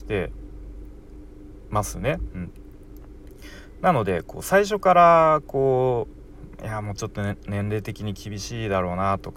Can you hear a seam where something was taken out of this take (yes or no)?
no